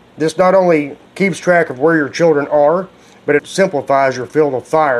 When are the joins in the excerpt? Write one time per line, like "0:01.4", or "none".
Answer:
0:01.1
0:03.4